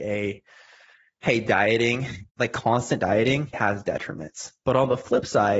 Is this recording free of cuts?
no; 2 cuts; at 2.3 s, 3.5 s

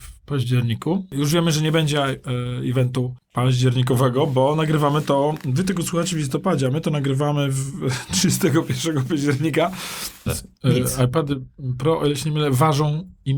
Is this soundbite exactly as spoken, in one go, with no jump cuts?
no; 1 cut; at 10.3 s

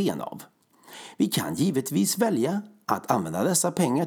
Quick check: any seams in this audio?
no; 0 cuts

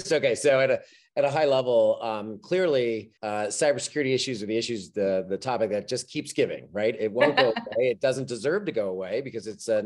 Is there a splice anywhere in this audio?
yes; 1 cut; at 3.2 s

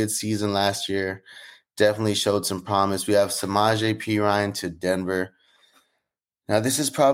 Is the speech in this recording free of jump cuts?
yes; 0 cuts

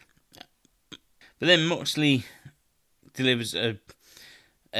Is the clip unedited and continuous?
no; 1 cut; at 1.2 s

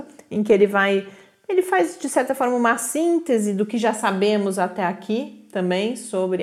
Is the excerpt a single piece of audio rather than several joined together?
yes; 0 cuts

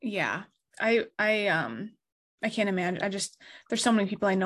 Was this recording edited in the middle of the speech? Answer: no; 0 cuts

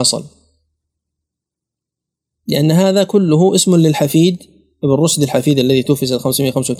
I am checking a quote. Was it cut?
no; 0 cuts

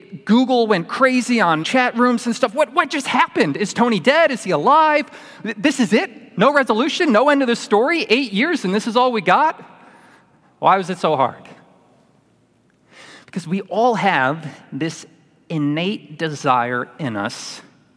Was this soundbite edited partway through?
yes; 2 cuts; at 1.6 s, 10.4 s

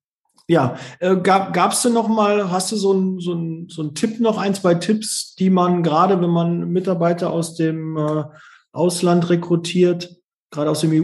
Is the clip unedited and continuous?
yes; 0 cuts

